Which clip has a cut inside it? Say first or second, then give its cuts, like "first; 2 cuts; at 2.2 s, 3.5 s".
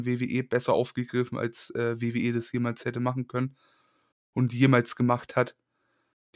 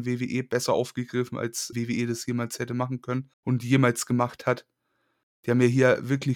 second; 2 cuts; at 1.7 s, 3.3 s